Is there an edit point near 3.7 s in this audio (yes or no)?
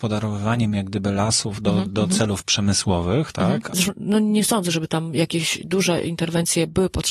yes